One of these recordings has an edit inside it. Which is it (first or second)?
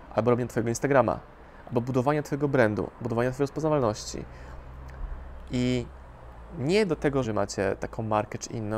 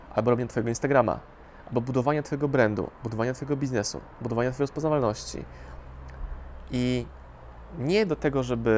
first